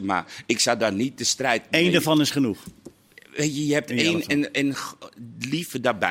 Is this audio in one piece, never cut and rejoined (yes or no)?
yes